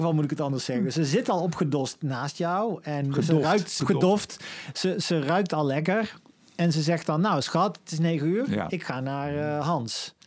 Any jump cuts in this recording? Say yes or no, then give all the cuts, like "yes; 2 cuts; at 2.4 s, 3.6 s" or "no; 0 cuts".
yes; 1 cut; at 3.8 s